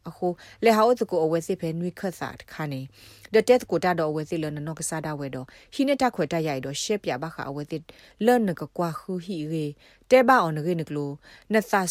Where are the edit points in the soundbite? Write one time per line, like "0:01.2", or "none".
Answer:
none